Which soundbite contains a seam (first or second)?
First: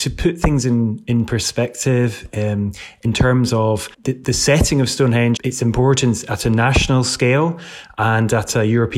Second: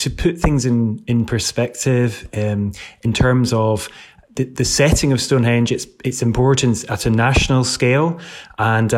first